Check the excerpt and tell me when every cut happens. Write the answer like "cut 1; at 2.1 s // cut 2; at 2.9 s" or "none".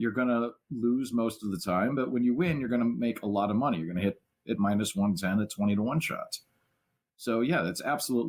none